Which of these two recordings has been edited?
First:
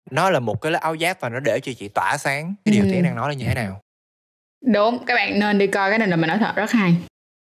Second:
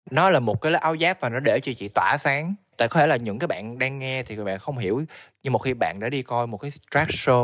first; 1 cut; at 2.7 s

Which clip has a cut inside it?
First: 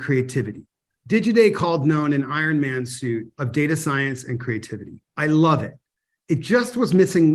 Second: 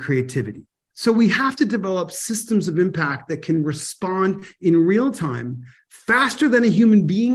second; 1 cut; at 0.9 s

